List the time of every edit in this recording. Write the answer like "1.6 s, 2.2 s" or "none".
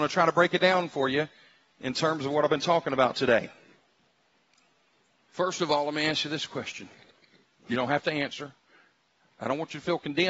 none